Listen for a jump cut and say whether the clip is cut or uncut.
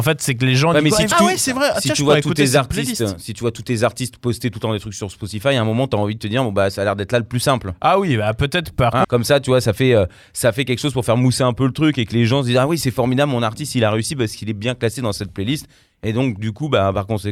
cut